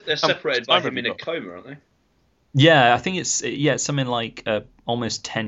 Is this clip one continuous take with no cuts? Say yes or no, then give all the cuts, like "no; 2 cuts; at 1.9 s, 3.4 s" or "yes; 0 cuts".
yes; 0 cuts